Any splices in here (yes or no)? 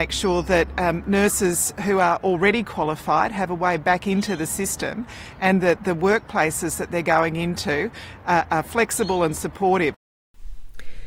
no